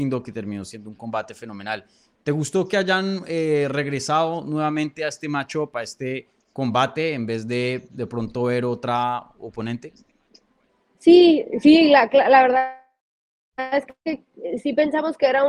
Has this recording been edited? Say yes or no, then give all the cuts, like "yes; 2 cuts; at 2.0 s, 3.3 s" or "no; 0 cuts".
no; 0 cuts